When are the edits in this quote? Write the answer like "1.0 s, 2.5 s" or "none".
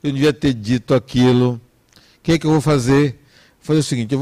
none